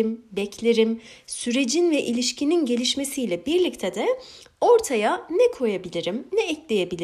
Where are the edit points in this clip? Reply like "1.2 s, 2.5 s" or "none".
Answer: none

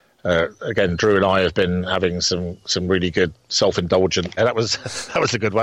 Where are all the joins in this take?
4.4 s

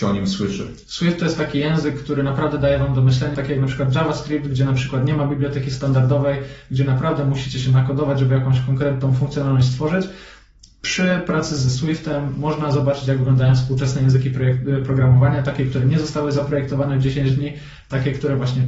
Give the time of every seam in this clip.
3.3 s

